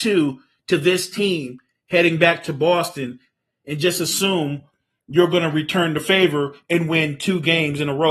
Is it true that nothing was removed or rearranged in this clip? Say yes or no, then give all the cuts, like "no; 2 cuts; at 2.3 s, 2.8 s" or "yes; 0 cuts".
yes; 0 cuts